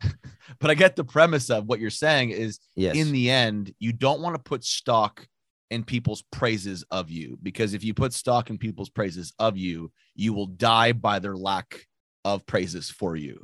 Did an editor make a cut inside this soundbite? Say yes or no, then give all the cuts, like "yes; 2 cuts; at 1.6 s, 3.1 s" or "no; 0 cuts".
no; 0 cuts